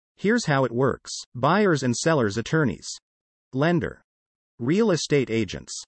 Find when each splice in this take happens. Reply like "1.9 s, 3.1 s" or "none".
1.3 s